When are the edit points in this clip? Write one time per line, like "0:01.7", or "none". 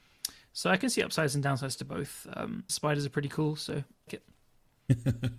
0:02.7
0:04.1